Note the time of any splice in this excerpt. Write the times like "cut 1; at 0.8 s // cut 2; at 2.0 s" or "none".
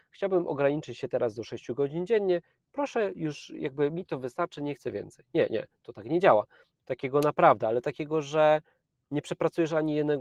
cut 1; at 6.7 s

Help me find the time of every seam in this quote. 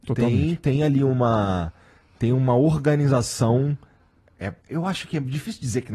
cut 1; at 4.6 s

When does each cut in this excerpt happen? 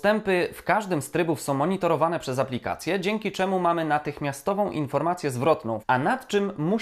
cut 1; at 5.8 s

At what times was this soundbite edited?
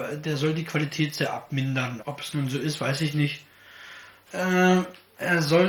cut 1; at 2.0 s // cut 2; at 4.3 s

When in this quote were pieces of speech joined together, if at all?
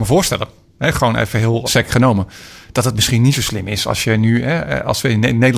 cut 1; at 1.6 s

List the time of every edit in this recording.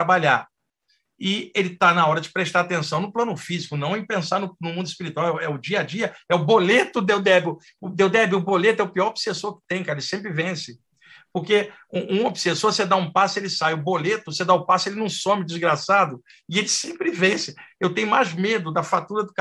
none

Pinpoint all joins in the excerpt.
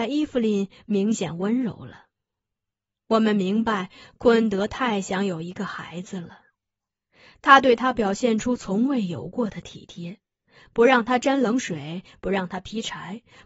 none

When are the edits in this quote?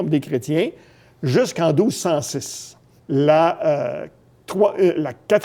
cut 1; at 3.0 s

